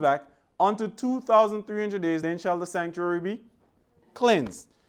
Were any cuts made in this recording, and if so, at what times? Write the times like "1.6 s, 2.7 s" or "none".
none